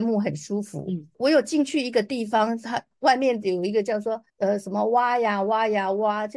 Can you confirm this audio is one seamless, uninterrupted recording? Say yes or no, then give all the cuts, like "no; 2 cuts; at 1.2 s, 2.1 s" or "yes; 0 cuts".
no; 1 cut; at 4.3 s